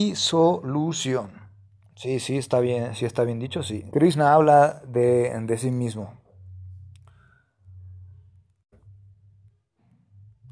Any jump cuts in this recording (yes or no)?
yes